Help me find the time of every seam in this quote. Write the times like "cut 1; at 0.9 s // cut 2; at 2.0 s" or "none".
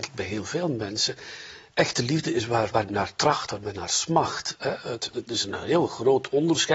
cut 1; at 2.7 s // cut 2; at 5.1 s